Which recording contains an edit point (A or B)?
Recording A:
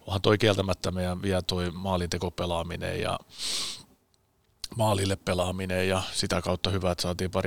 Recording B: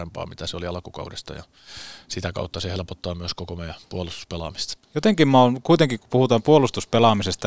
B